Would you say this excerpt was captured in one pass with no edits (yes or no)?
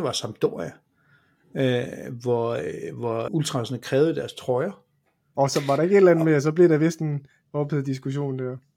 no